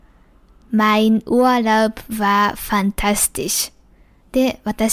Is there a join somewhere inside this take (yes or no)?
no